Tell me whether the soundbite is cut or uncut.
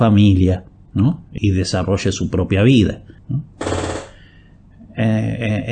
cut